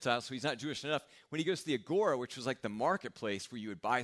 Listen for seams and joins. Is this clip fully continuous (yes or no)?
yes